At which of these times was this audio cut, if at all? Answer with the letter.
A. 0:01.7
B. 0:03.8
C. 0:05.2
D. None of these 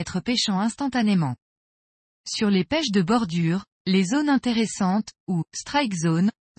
D